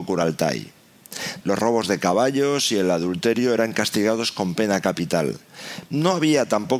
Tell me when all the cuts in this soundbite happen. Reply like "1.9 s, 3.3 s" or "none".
1.4 s, 5.9 s